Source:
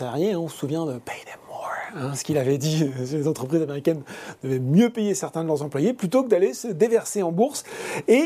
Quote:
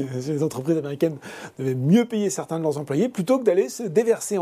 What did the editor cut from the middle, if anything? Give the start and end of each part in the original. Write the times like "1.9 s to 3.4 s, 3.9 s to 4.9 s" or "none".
none